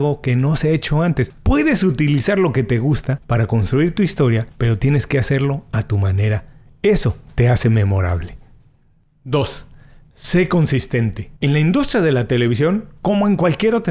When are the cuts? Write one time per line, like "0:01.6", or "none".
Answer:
0:11.4